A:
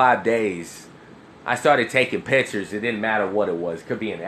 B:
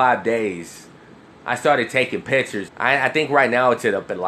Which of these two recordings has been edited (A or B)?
B